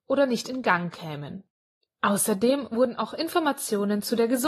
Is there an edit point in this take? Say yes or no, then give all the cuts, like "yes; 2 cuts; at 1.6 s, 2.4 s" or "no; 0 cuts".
yes; 1 cut; at 1.8 s